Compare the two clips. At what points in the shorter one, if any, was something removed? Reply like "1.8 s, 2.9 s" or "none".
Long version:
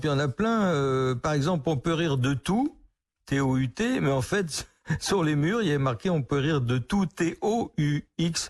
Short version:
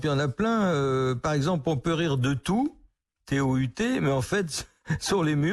none